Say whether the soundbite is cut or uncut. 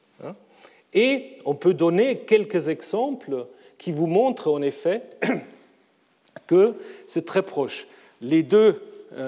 uncut